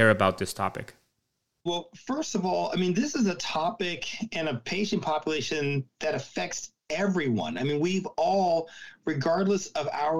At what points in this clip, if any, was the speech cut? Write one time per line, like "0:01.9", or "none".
0:01.7